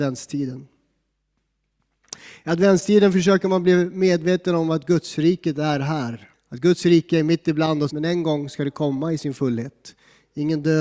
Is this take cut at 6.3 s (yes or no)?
yes